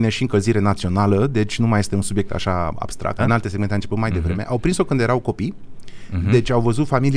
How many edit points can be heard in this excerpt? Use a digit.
1